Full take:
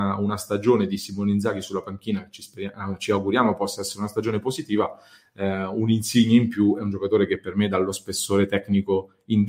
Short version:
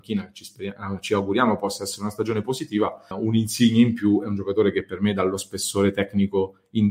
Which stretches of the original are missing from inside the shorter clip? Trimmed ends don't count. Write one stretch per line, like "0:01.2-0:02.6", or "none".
0:05.1-0:05.7